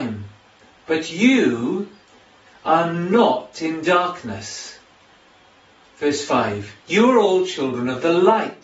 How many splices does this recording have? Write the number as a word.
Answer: one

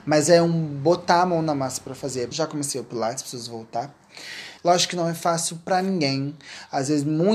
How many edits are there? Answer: two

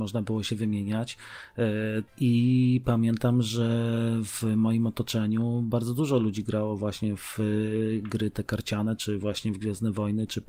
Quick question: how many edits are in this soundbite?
two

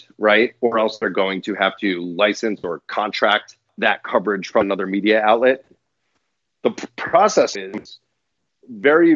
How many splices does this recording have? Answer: one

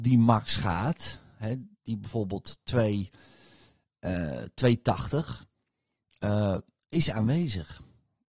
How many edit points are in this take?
zero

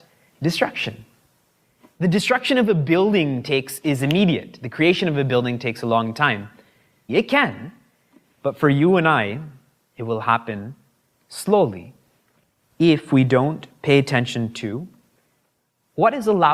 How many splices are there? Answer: one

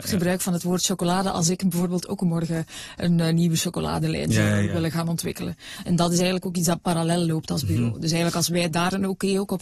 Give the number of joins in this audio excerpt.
zero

